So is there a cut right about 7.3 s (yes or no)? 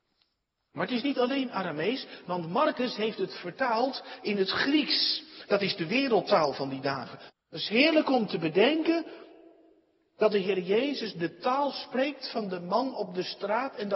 yes